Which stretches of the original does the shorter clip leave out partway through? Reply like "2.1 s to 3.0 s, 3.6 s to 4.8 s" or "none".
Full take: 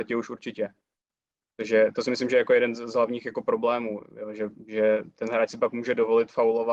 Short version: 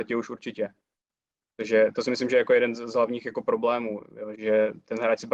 4.3 s to 4.6 s